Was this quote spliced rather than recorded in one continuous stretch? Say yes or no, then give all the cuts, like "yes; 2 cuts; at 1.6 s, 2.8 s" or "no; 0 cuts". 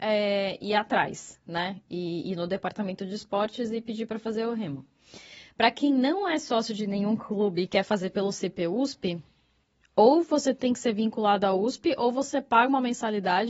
no; 0 cuts